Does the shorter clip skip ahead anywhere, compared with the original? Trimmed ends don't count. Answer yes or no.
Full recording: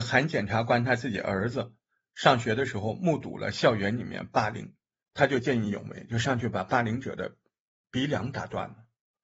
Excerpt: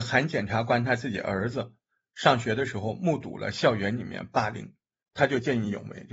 no